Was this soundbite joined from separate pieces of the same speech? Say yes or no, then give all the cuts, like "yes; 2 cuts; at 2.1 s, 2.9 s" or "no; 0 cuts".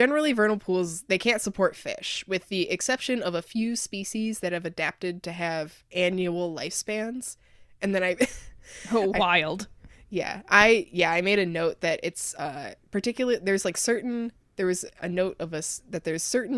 no; 0 cuts